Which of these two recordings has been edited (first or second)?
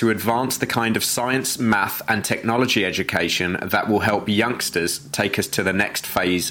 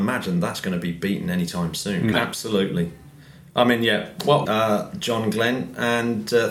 second